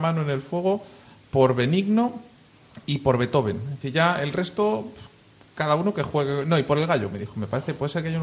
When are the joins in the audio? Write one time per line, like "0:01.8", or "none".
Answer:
none